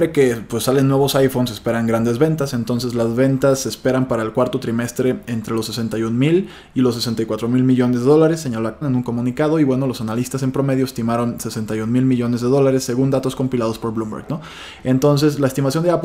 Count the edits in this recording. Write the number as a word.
one